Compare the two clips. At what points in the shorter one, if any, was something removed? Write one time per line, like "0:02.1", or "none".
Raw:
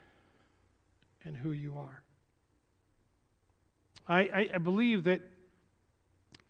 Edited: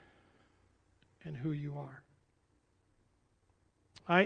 none